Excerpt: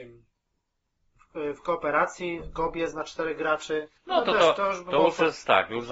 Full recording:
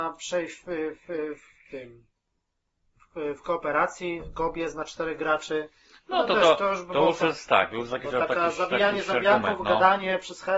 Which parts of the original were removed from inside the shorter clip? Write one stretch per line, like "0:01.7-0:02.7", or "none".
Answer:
0:05.8-0:06.0